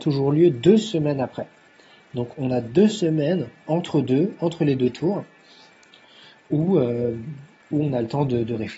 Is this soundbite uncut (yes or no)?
yes